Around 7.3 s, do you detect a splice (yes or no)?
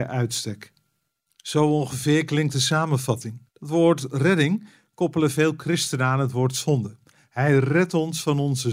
no